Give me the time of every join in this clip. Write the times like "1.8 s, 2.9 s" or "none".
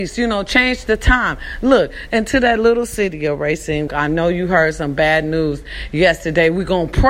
3.9 s